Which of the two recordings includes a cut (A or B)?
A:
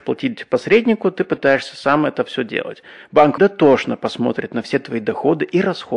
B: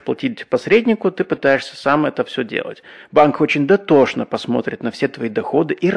A